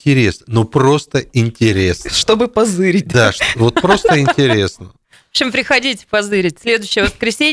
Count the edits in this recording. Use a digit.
0